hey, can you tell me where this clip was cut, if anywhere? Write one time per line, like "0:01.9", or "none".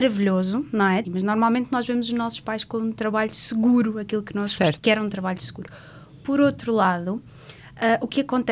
0:01.0
0:04.8